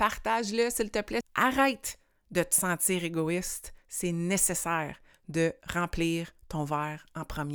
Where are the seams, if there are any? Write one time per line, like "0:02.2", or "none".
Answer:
0:01.2